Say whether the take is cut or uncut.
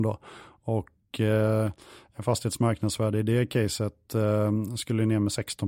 uncut